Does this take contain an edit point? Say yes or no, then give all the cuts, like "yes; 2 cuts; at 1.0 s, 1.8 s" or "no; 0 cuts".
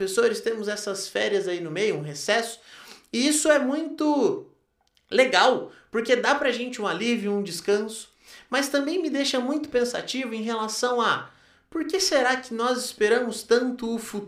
no; 0 cuts